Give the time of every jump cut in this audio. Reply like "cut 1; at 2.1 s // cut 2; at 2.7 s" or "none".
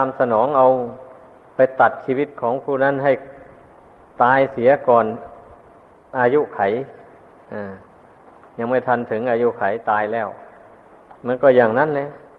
cut 1; at 11.2 s